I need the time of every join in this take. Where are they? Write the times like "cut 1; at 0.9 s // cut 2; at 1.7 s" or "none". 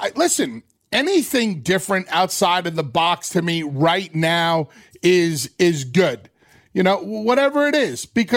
none